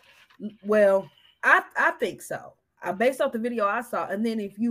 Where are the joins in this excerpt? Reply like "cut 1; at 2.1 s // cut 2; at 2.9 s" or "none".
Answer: cut 1; at 1.4 s